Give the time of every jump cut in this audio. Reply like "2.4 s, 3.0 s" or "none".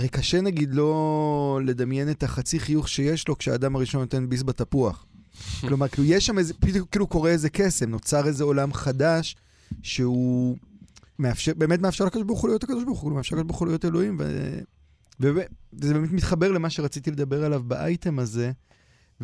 11.2 s